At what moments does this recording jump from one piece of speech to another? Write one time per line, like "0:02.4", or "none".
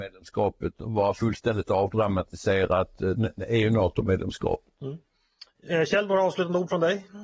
0:03.2